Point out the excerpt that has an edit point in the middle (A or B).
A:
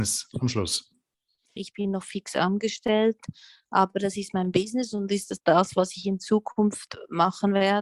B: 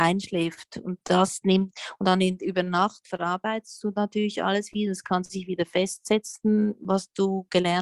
A